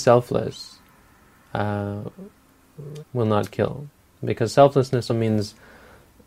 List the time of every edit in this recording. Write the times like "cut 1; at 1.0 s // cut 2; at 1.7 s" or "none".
cut 1; at 3.0 s // cut 2; at 5.1 s